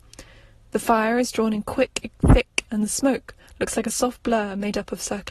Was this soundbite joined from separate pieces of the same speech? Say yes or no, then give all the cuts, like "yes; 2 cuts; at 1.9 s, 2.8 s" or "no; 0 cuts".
yes; 1 cut; at 2.7 s